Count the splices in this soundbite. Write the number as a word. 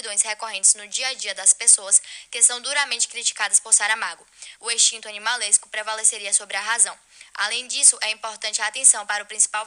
one